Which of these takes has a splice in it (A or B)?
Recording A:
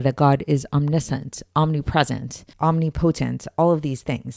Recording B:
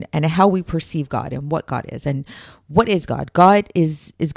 A